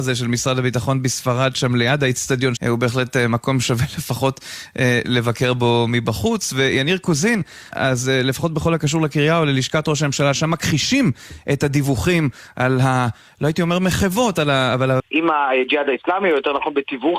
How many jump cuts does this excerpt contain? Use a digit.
3